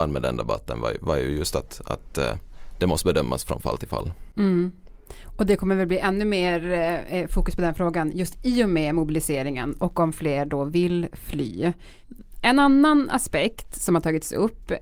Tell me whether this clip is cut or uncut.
uncut